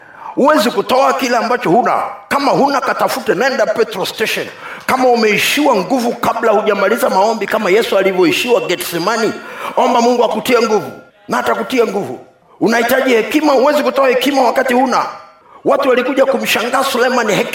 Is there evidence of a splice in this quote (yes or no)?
no